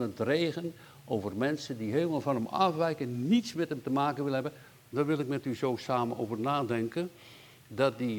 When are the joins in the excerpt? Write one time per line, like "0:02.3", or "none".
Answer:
0:04.7

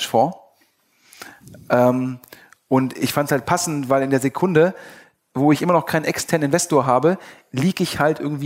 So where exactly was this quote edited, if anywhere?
none

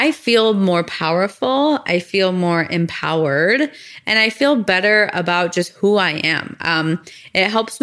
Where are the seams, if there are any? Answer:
none

